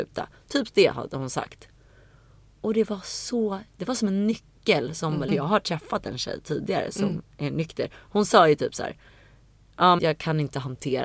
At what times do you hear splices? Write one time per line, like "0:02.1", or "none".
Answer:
0:05.3
0:10.0